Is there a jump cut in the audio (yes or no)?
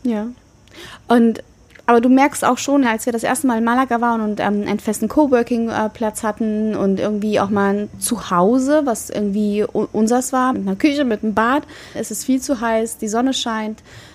yes